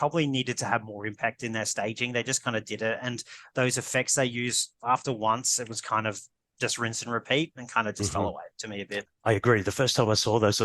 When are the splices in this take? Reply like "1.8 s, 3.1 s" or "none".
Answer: none